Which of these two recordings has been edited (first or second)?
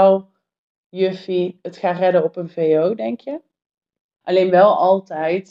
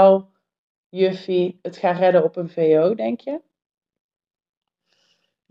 first